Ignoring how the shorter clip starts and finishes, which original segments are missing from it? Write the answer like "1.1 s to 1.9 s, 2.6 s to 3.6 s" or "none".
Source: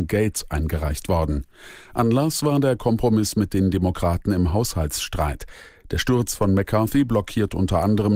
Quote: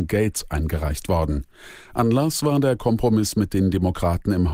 none